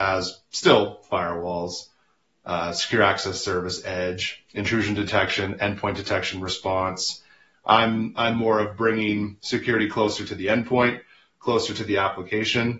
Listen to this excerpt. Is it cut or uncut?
cut